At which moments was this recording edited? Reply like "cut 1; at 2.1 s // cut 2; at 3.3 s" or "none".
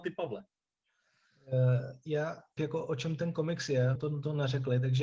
cut 1; at 2.6 s // cut 2; at 3.9 s